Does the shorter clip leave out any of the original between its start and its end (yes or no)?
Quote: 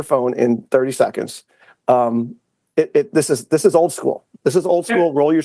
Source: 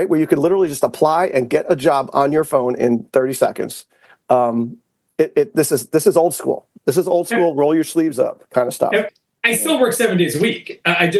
no